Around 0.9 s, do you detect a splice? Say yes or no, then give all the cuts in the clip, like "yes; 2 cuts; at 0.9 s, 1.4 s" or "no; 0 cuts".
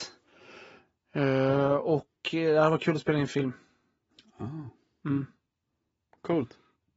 no; 0 cuts